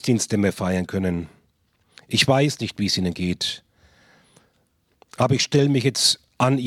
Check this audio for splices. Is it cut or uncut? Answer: uncut